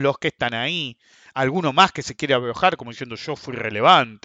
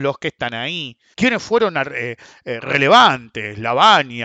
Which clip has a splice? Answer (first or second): second